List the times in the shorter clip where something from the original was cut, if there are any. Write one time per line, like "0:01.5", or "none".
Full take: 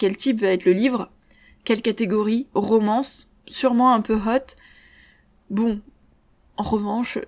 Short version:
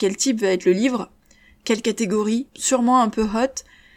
0:02.5